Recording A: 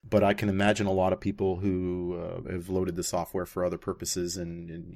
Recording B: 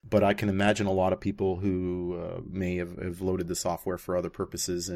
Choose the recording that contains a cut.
A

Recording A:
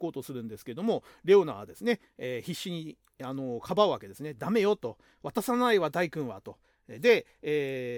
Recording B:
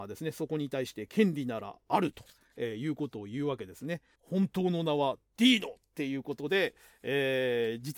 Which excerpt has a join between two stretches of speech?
B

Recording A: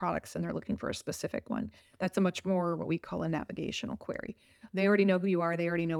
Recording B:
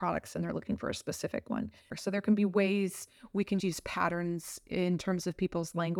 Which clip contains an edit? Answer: B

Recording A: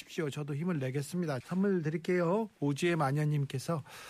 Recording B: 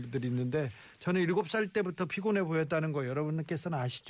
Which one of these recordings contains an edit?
A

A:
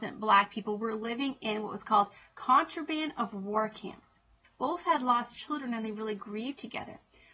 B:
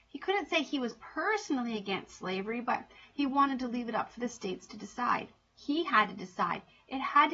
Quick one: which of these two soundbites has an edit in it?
A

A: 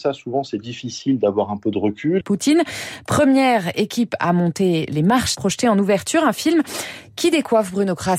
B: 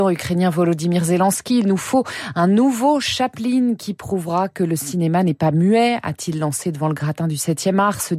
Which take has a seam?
A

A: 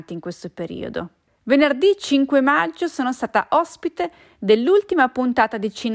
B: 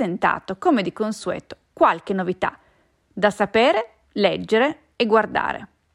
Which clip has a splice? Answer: A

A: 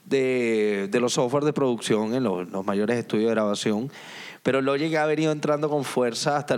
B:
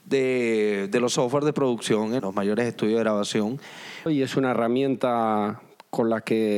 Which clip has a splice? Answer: B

